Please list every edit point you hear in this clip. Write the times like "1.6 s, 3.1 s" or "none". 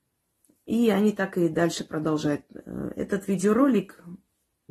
none